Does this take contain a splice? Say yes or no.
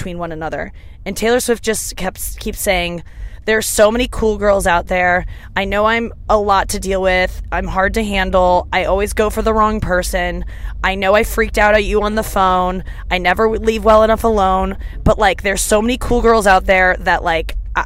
no